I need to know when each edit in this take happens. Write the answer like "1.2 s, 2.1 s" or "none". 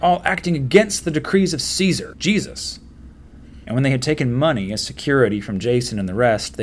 2.1 s, 3.6 s